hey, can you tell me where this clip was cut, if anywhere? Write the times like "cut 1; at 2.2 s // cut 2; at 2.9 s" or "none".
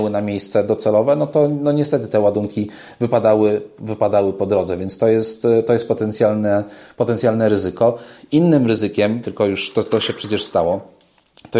cut 1; at 9.2 s